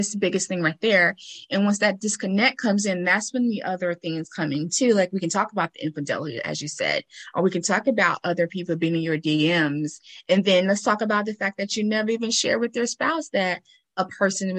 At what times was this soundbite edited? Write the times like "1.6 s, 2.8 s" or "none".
none